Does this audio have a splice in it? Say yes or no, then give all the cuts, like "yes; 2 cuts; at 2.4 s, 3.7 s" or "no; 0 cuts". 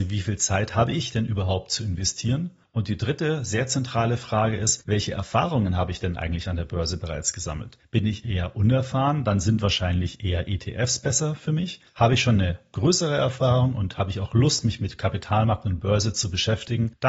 no; 0 cuts